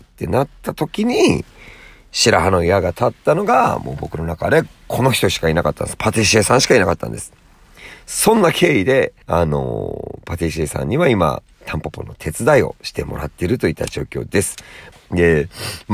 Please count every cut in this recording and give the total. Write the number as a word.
two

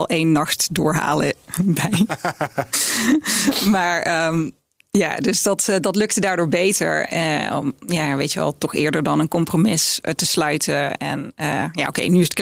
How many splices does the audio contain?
zero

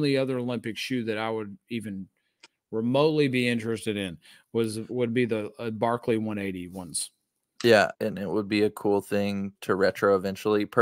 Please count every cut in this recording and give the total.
two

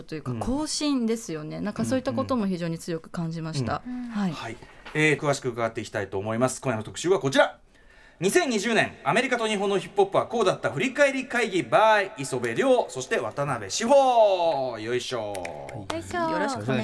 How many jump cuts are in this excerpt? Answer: one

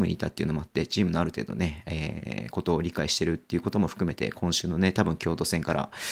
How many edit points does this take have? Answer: zero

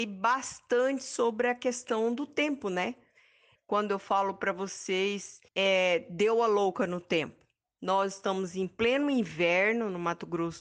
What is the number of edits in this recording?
two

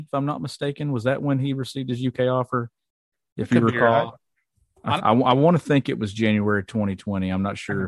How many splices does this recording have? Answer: one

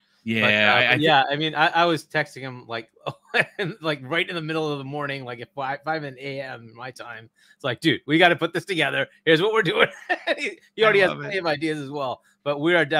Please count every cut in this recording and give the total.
zero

